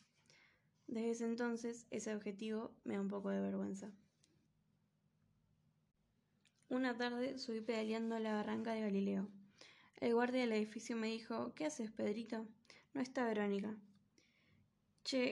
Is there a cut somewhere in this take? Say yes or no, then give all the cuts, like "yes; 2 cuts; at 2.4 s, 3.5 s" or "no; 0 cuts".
yes; 1 cut; at 2.8 s